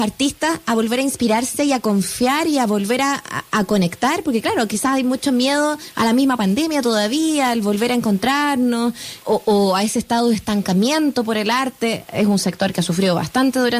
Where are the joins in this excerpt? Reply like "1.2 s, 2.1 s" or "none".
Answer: 9.2 s